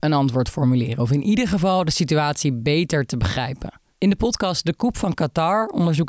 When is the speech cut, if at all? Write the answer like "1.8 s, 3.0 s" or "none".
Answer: none